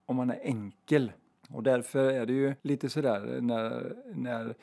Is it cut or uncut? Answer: cut